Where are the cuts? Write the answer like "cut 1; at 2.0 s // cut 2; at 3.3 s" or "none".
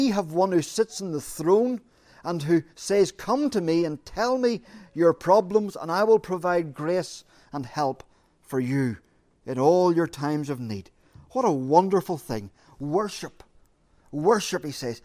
none